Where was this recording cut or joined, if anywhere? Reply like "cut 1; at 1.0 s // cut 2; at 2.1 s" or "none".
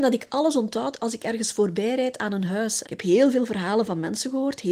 cut 1; at 2.8 s